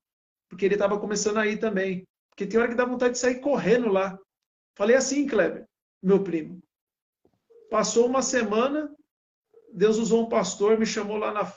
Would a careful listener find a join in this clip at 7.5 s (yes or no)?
yes